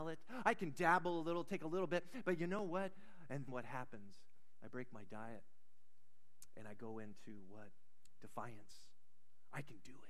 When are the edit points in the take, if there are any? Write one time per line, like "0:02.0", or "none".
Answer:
0:03.5